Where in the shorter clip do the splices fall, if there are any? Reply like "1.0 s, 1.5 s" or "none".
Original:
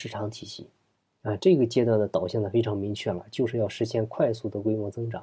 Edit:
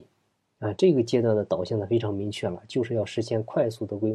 none